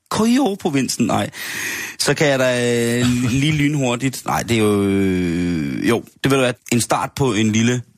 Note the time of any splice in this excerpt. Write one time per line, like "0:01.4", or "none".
0:06.5